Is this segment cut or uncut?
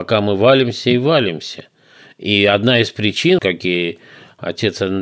cut